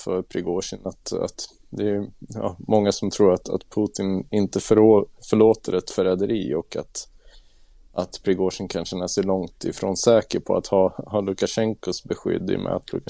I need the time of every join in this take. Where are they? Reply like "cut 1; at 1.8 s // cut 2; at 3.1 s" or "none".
none